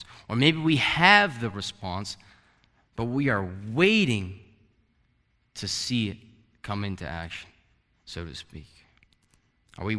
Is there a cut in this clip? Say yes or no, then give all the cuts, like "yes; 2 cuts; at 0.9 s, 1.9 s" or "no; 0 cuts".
yes; 1 cut; at 7.9 s